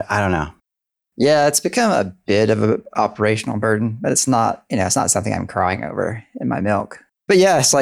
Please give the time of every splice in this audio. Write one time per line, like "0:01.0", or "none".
none